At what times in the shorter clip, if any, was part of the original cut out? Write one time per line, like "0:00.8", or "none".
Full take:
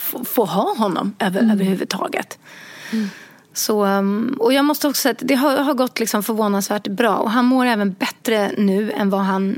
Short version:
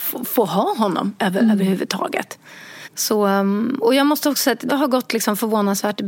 0:02.8
0:04.7